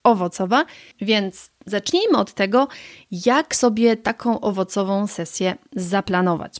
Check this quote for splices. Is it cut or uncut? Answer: cut